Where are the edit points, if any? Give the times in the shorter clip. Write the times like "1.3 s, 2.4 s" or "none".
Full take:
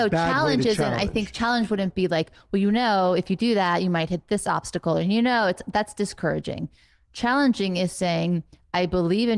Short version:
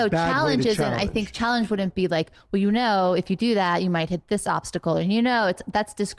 none

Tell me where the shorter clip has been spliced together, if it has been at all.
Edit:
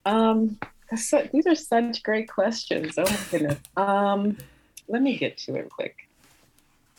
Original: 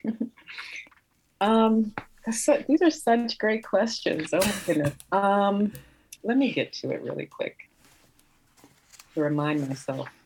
5.7 s

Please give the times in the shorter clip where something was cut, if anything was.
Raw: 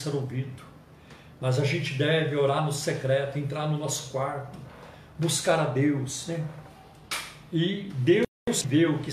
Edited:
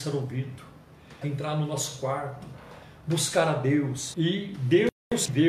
1.2 s, 4.1 s

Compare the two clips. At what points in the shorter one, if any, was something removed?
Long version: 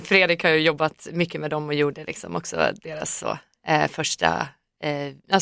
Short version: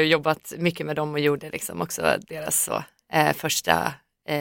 none

